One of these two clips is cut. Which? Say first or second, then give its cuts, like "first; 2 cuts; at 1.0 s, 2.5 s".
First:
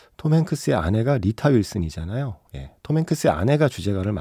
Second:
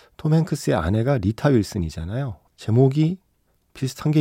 second; 1 cut; at 2.5 s